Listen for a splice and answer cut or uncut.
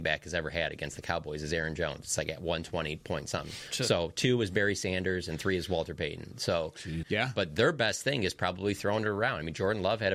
cut